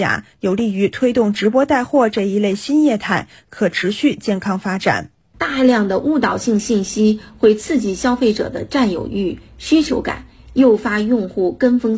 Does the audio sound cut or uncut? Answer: uncut